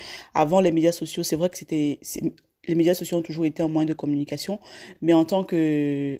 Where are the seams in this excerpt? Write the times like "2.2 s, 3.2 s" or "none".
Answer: none